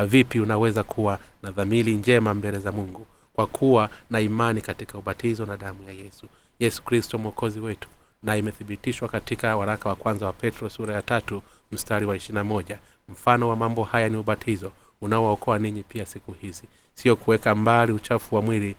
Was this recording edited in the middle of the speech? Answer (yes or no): no